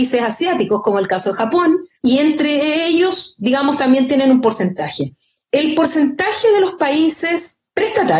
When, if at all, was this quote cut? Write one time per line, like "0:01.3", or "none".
0:02.0